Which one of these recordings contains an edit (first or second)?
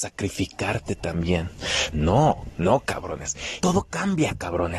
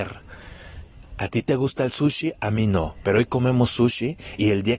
first